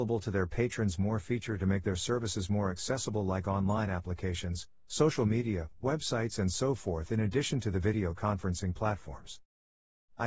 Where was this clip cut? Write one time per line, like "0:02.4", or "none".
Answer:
none